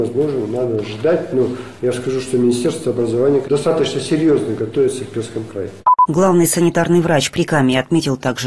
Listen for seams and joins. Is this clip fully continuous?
yes; 0 cuts

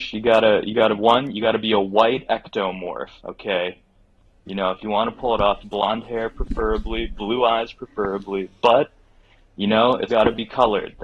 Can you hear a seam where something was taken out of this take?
yes; 3 cuts; at 3.2 s, 5.6 s, 10.1 s

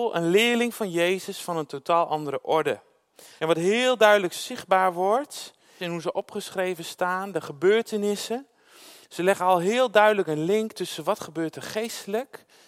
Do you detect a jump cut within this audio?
yes; 2 cuts; at 3.4 s, 5.8 s

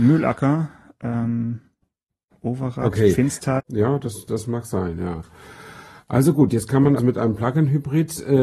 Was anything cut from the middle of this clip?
yes; 2 cuts; at 3.6 s, 7.0 s

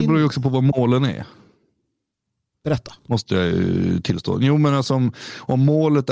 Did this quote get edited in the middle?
no; 0 cuts

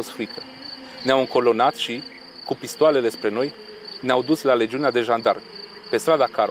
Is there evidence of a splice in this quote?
no; 0 cuts

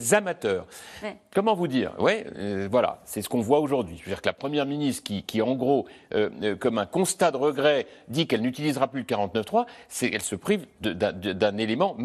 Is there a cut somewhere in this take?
no; 0 cuts

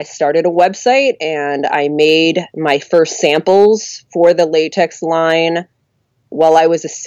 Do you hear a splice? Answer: no; 0 cuts

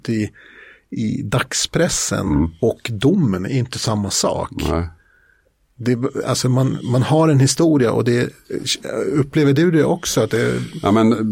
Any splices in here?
no; 0 cuts

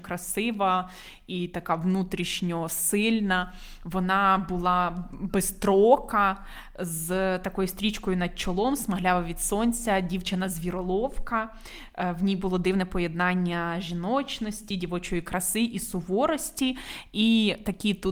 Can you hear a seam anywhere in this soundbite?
no; 0 cuts

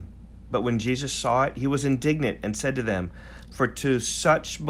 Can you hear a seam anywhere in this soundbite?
yes; 1 cut; at 3.5 s

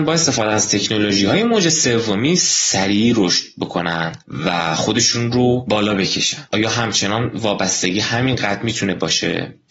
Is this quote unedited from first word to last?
no; 1 cut; at 6.5 s

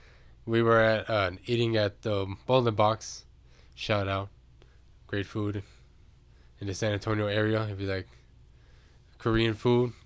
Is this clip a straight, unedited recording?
yes; 0 cuts

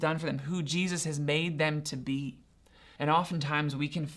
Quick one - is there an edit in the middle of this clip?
yes; 1 cut; at 3.0 s

